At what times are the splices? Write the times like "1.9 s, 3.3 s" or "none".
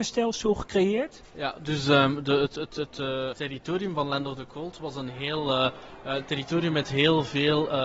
3.3 s